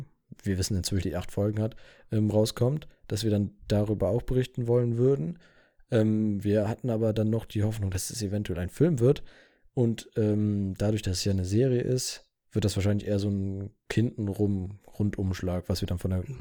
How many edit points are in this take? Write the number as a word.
one